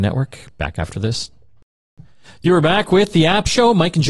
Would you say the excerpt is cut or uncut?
uncut